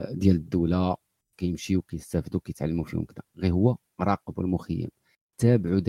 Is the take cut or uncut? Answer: uncut